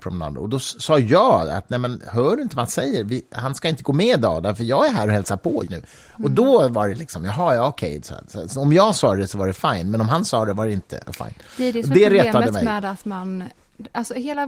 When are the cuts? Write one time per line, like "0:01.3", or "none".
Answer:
0:05.7